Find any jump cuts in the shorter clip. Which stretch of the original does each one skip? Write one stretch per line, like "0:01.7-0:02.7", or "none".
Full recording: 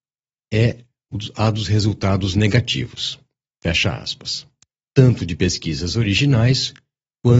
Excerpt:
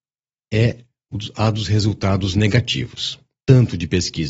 0:03.4-0:04.9